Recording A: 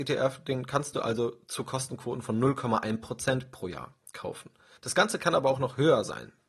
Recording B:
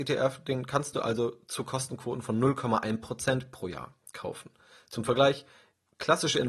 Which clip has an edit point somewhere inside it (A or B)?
A